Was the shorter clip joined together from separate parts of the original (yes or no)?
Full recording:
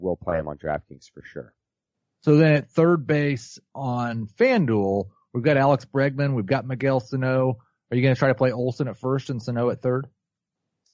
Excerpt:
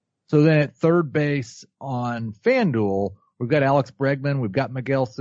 no